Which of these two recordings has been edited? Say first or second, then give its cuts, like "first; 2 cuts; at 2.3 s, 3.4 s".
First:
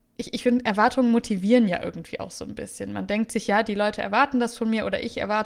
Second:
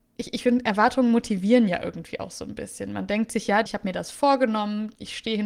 second; 1 cut; at 3.7 s